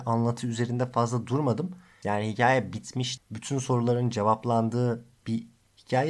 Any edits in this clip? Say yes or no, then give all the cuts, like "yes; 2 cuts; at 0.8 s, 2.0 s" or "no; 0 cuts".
yes; 2 cuts; at 2.0 s, 3.2 s